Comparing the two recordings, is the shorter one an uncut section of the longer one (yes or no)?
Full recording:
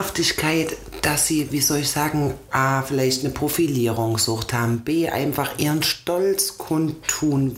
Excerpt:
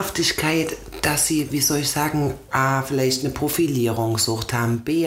yes